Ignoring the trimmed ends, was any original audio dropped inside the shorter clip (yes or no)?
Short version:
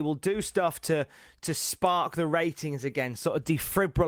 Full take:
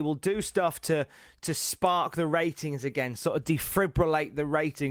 no